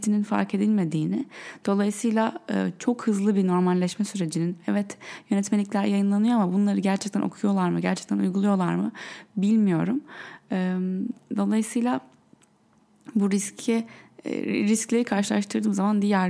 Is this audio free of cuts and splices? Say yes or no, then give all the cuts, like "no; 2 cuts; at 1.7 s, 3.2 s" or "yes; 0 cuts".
yes; 0 cuts